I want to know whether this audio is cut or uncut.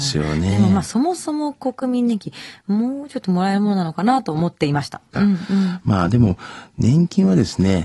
cut